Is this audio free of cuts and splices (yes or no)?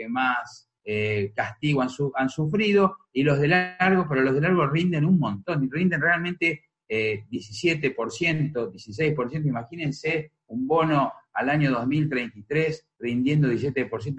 yes